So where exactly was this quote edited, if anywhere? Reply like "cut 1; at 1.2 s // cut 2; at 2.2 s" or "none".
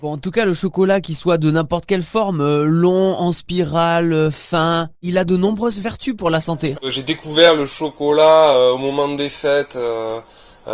cut 1; at 6.7 s